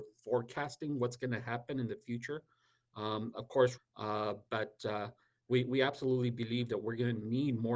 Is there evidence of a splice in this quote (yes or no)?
yes